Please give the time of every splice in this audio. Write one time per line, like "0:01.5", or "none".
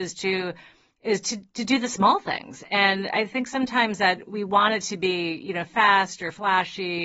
none